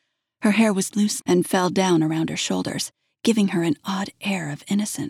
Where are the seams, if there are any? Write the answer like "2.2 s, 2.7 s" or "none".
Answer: 1.2 s